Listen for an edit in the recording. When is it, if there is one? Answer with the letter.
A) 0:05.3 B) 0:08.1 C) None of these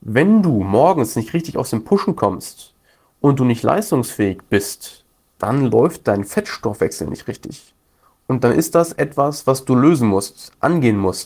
A